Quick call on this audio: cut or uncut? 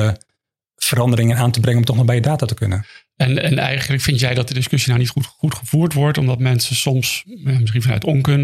uncut